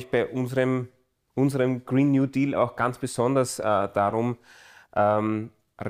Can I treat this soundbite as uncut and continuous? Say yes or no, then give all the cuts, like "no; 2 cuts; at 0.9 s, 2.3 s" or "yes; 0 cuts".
yes; 0 cuts